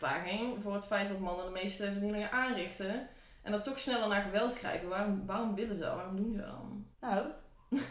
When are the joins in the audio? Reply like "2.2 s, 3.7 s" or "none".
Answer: 6.9 s